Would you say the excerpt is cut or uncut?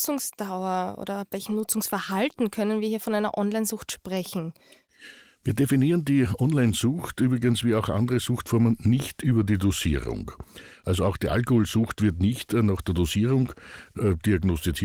uncut